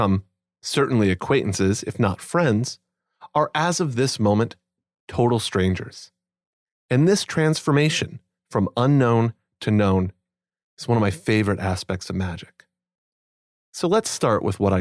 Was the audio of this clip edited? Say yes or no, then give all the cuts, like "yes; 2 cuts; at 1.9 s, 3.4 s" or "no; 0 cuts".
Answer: no; 0 cuts